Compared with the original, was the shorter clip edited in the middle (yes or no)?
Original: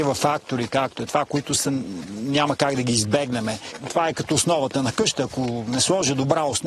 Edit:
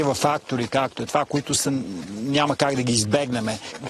no